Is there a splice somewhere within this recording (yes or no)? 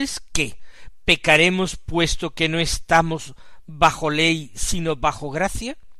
no